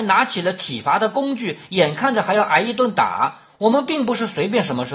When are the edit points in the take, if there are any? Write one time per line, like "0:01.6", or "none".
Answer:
0:03.4